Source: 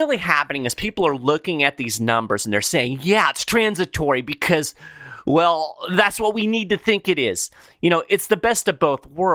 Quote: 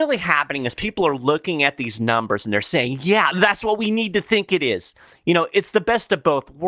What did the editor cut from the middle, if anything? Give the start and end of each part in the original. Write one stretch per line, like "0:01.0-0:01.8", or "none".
0:03.3-0:05.9